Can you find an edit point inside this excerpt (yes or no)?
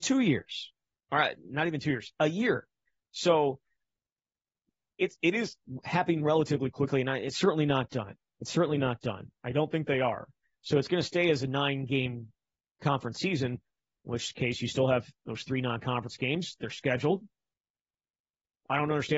yes